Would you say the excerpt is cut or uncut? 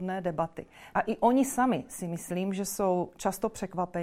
cut